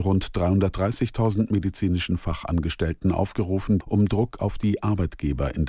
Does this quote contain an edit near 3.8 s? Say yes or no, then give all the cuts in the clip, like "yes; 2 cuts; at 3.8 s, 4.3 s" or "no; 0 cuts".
yes; 1 cut; at 3.8 s